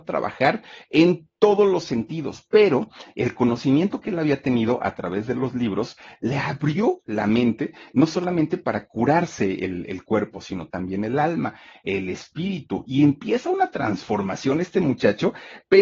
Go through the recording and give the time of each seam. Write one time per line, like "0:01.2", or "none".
none